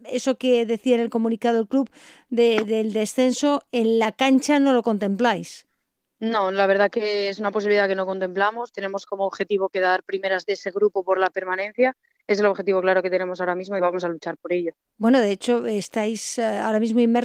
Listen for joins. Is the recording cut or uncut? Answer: cut